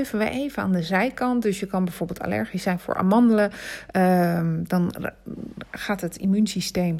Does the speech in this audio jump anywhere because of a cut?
no; 0 cuts

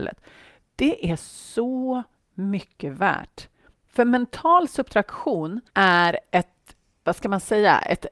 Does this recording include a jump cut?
yes; 2 cuts; at 3.7 s, 5.7 s

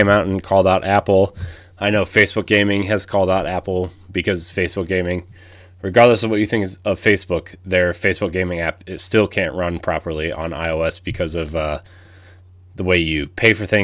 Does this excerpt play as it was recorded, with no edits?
yes; 0 cuts

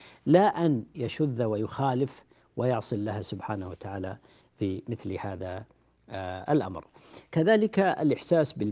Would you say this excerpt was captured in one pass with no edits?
yes; 0 cuts

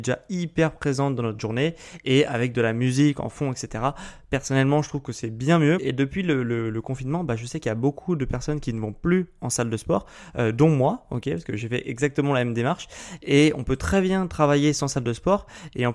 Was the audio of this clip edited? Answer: yes; 1 cut; at 5.8 s

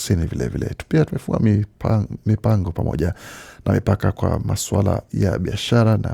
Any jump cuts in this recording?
no; 0 cuts

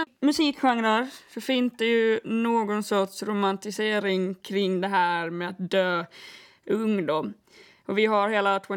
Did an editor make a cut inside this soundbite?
no; 0 cuts

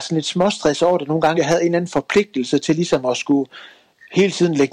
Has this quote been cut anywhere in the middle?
yes; 1 cut; at 1.3 s

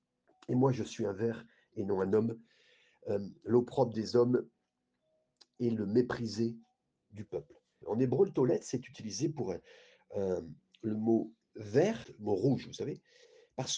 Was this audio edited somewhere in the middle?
yes; 2 cuts; at 7.8 s, 12.0 s

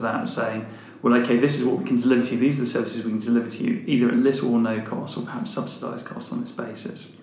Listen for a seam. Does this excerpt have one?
no; 0 cuts

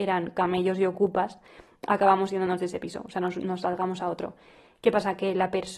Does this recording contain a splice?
no; 0 cuts

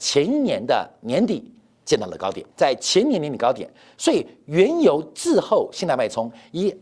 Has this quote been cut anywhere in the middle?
yes; 1 cut; at 2.5 s

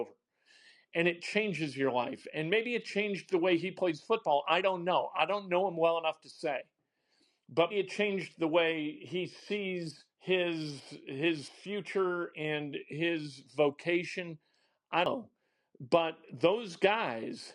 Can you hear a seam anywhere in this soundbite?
yes; 3 cuts; at 7.7 s, 10.1 s, 12.3 s

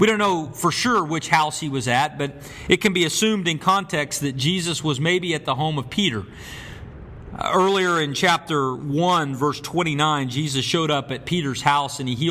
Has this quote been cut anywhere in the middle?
no; 0 cuts

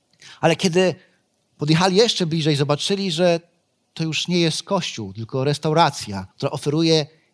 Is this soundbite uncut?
no; 1 cut; at 6.3 s

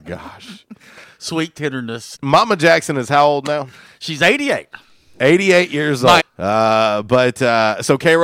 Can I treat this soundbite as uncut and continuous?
no; 2 cuts; at 2.2 s, 6.2 s

